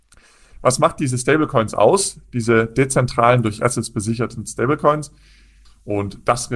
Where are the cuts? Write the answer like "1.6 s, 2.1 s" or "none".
5.6 s